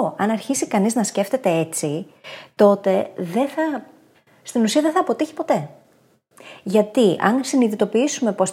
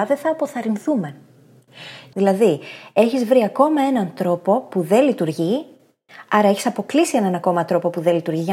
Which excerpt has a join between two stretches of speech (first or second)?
second